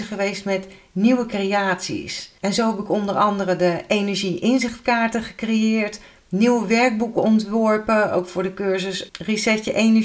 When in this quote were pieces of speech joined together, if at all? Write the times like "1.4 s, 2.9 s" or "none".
2.4 s, 9.1 s